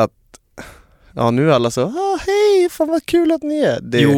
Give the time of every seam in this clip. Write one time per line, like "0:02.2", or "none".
0:02.7